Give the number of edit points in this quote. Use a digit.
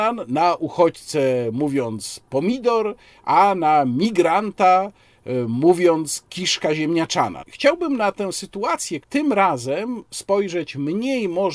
2